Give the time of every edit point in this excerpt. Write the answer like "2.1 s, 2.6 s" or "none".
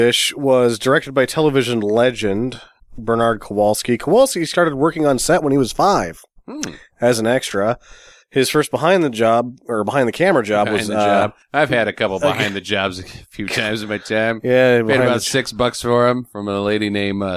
none